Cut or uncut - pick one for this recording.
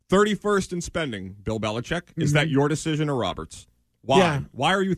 uncut